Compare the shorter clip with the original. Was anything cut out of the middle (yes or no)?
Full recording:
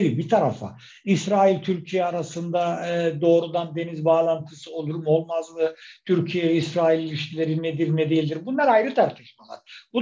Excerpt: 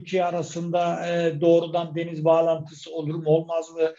no